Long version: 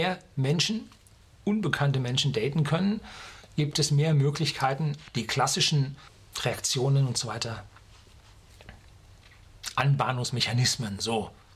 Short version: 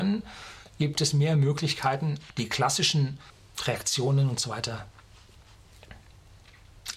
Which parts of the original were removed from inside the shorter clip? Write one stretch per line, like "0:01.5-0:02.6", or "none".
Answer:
none